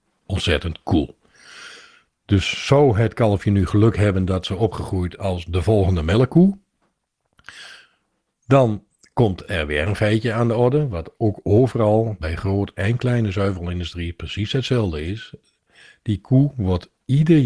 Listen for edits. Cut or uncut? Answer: uncut